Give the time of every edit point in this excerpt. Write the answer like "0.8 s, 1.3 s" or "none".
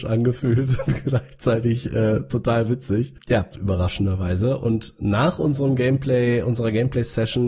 3.5 s